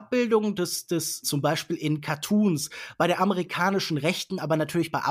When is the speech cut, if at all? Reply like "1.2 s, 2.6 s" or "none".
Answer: 1.2 s

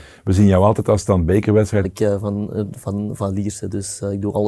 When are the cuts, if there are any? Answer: 1.8 s

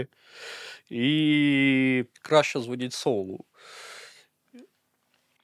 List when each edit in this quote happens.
2.1 s

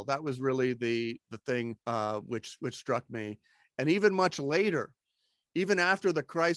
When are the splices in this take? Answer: 1.8 s

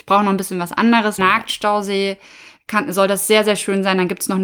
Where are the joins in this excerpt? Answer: 1.2 s

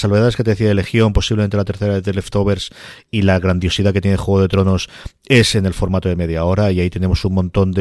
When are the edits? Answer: none

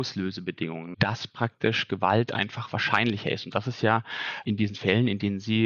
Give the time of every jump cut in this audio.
0.9 s

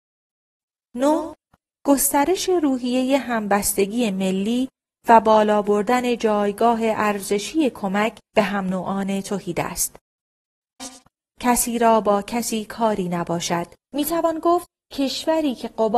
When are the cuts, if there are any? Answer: 10.8 s, 13.8 s

